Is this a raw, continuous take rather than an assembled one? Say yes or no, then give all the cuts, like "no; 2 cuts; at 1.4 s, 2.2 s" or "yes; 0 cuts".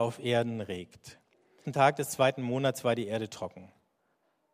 no; 1 cut; at 1.6 s